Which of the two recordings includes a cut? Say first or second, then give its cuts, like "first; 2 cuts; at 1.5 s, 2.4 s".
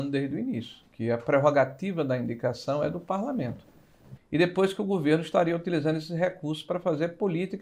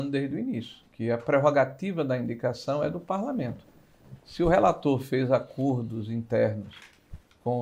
first; 1 cut; at 4.2 s